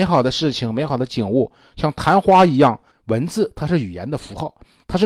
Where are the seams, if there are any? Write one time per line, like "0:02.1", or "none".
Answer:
0:02.9

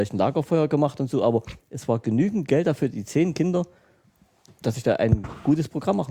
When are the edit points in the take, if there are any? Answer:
none

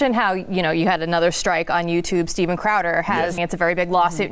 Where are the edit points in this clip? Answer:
0:03.4

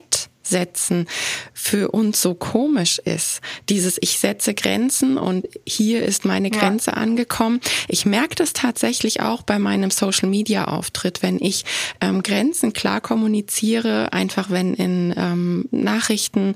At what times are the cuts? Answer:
none

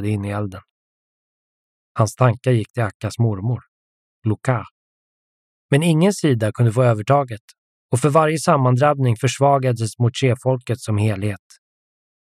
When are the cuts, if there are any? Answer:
0:05.5

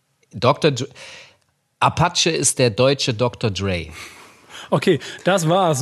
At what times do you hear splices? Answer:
none

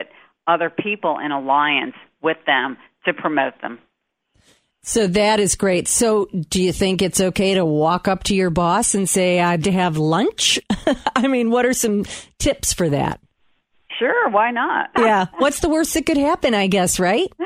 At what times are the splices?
0:09.6
0:14.9

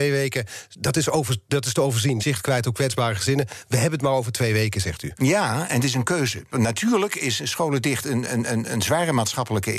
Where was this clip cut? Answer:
0:02.2
0:06.5

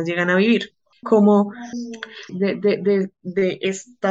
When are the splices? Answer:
0:01.0
0:02.3

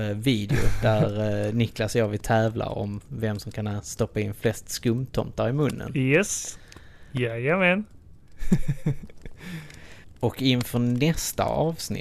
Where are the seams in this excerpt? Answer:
none

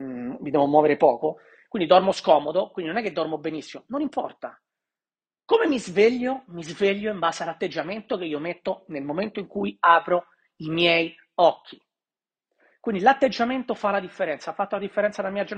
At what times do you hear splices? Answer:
none

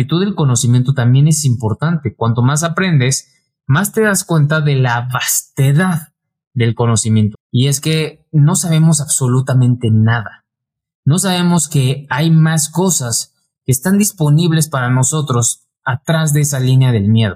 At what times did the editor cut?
0:07.3

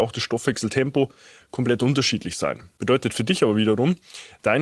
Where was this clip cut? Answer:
none

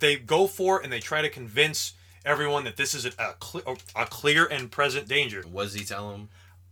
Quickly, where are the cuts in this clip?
0:05.4

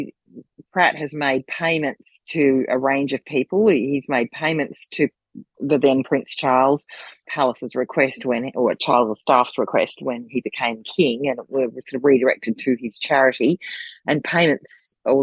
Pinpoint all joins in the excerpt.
0:07.2

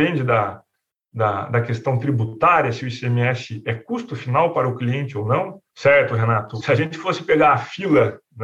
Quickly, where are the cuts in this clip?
0:05.7

